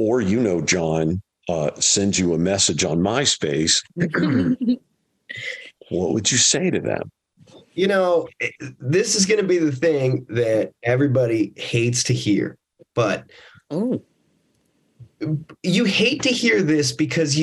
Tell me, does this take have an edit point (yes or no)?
no